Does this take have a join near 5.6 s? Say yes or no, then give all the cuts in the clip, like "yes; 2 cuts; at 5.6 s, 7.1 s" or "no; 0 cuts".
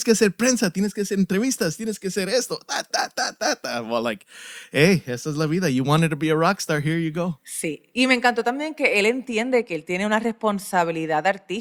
no; 0 cuts